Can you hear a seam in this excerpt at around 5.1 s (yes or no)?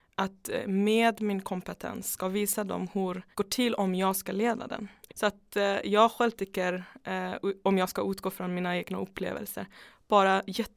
yes